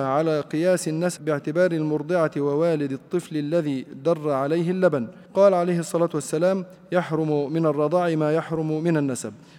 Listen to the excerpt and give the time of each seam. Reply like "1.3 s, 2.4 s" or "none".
1.2 s, 5.3 s